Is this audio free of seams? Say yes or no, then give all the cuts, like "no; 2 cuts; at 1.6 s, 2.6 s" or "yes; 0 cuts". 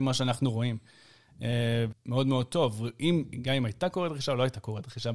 no; 1 cut; at 1.9 s